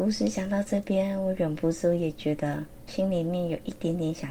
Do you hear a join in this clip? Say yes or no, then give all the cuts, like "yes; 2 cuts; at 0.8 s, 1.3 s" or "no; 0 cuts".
yes; 1 cut; at 2.9 s